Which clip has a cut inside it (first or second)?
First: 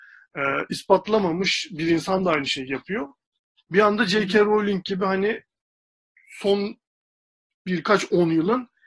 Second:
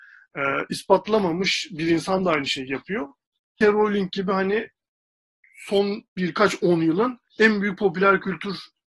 second